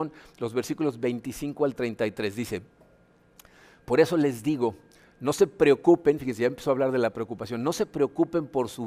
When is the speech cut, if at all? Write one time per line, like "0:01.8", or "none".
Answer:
none